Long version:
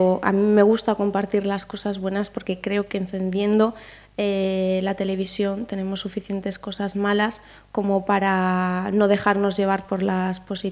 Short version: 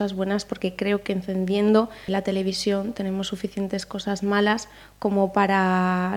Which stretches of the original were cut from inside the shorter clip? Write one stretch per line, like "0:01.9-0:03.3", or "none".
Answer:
0:03.9-0:04.8